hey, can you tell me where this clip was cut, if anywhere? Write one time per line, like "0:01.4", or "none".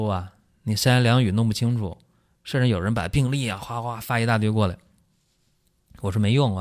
none

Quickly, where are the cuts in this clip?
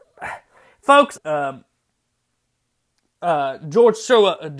0:01.2

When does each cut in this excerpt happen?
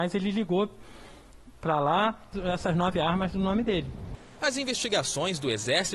0:02.3

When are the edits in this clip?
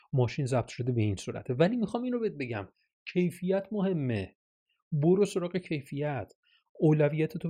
none

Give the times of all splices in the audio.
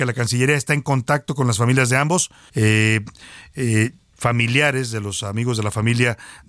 0:02.5
0:04.1

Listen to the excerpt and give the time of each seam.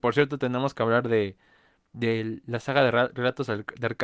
none

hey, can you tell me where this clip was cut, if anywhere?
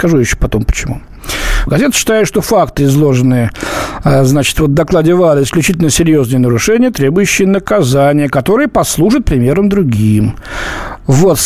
0:01.7

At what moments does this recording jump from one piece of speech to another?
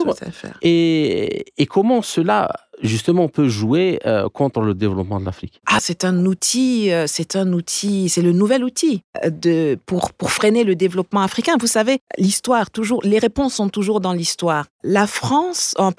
0:05.8

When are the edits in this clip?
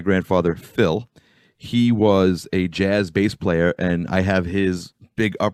none

